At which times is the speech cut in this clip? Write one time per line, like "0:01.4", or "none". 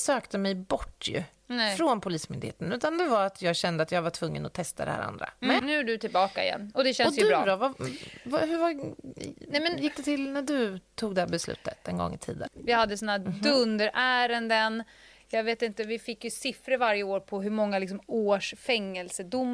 0:05.6
0:12.5